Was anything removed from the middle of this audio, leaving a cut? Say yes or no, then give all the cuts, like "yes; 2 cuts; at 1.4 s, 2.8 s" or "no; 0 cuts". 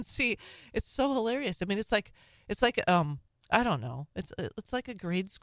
no; 0 cuts